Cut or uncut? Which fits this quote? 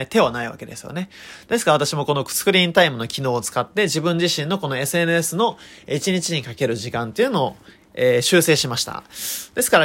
uncut